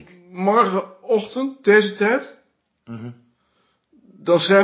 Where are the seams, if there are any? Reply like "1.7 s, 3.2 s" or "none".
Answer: none